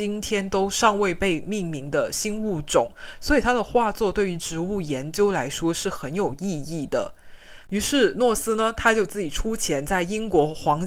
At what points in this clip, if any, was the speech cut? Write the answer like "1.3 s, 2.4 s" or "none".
7.7 s